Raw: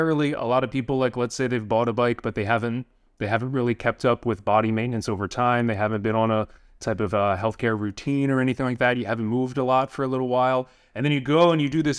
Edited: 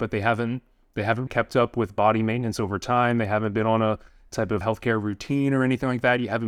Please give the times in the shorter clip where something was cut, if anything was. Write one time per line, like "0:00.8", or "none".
0:01.3
0:04.6

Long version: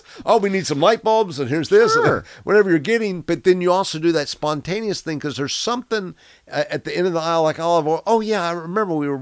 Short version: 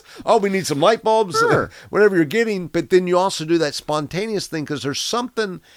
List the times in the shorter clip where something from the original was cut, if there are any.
0:01.3

